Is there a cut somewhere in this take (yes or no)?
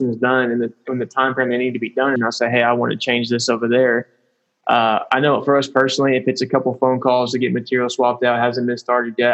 yes